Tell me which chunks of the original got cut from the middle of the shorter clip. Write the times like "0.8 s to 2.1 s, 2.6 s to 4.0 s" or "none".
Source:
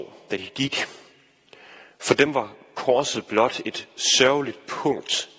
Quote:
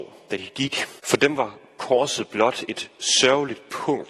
1.0 s to 2.0 s

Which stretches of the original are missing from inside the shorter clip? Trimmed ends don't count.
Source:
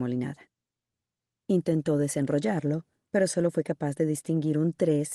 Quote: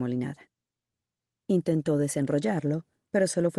none

